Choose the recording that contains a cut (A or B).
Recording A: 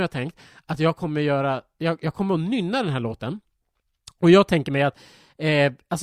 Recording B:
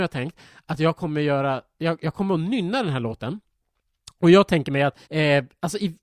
B